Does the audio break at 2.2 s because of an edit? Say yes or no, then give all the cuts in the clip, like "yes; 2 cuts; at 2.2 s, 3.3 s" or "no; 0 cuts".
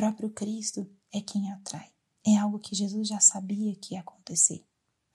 yes; 1 cut; at 2.2 s